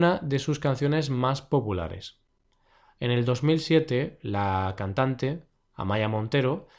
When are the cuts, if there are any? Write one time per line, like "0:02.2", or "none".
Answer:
none